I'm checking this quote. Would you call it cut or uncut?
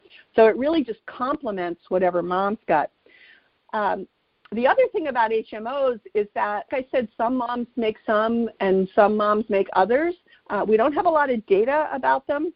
cut